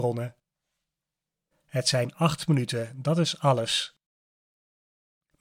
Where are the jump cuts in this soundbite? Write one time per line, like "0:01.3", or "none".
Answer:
0:01.5